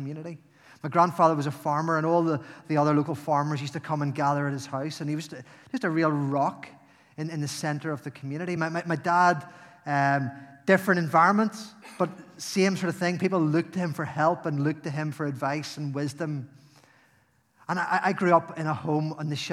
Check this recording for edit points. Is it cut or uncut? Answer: uncut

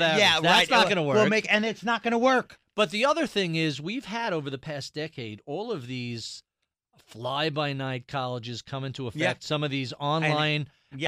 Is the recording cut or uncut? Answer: uncut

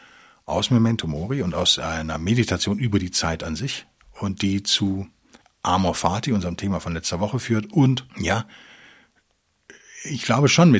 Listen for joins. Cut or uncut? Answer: cut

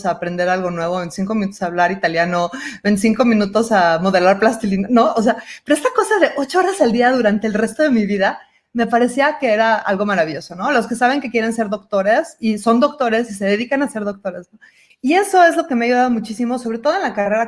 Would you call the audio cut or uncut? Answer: cut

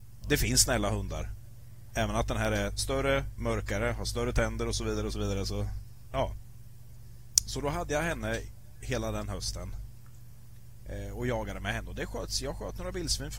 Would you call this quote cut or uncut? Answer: uncut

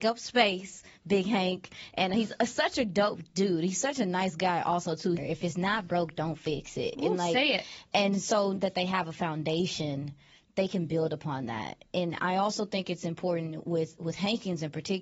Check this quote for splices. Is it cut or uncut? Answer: cut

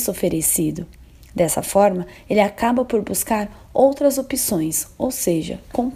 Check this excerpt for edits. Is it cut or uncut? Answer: uncut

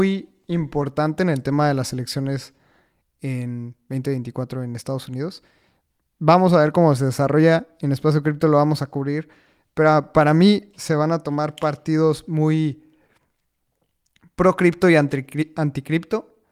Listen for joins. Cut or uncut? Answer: uncut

